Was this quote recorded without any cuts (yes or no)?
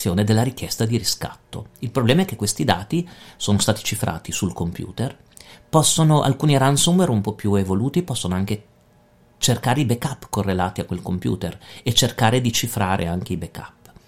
yes